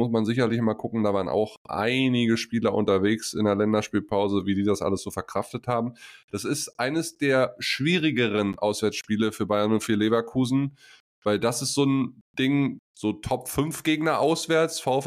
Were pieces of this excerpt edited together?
no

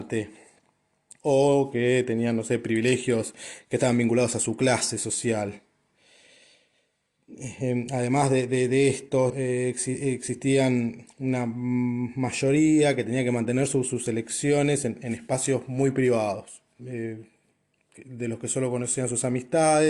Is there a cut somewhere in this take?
yes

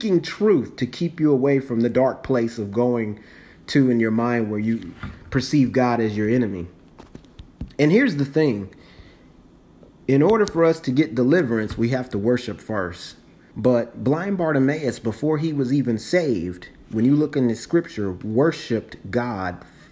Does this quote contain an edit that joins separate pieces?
yes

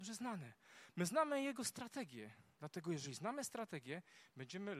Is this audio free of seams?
yes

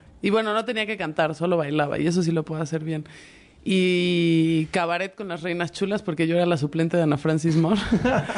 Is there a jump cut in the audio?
no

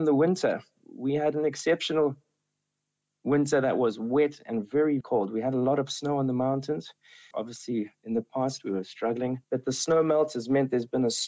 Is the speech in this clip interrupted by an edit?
yes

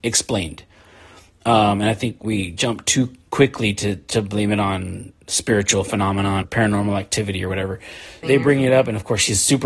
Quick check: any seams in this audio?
yes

